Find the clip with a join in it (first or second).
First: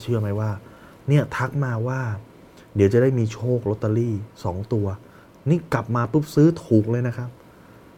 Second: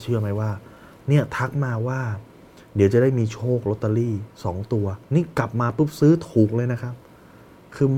second